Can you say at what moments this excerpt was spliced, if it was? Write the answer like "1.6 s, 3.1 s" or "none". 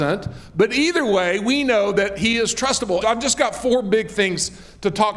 3.0 s

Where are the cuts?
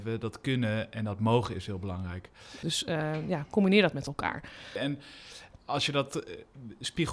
2.6 s, 4.8 s

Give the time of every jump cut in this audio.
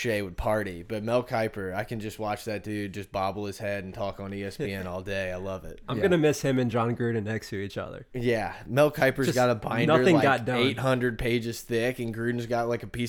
8.1 s

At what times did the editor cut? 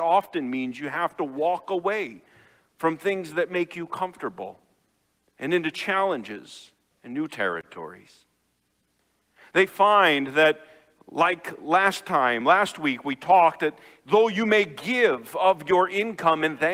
none

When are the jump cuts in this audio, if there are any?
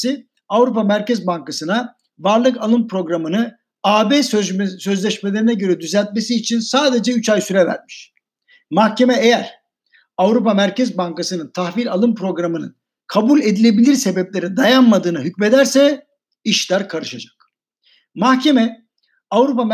none

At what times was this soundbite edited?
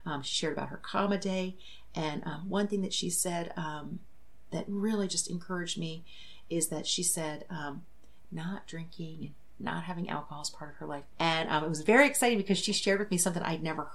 8.2 s, 11.1 s

